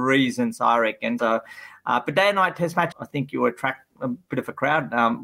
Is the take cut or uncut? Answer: cut